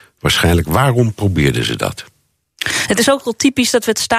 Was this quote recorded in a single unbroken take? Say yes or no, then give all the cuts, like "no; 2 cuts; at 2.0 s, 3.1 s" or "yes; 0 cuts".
yes; 0 cuts